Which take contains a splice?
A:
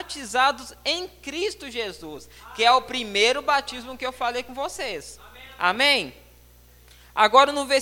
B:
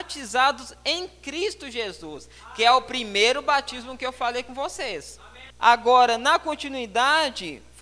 B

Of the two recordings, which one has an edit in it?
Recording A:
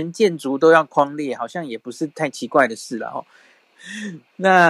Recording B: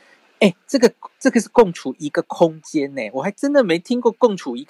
A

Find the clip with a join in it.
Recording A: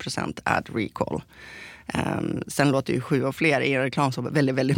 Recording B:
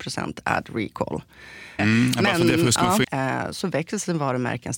B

